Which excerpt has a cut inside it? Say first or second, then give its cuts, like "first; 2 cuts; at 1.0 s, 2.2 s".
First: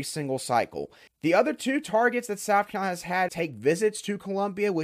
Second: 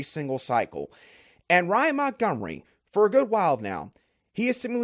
first; 2 cuts; at 1.1 s, 3.3 s